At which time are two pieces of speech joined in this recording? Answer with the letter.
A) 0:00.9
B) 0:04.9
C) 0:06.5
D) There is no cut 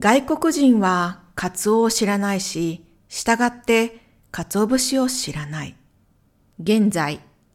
C